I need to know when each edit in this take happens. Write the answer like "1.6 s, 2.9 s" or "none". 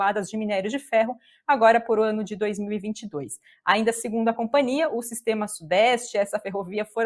none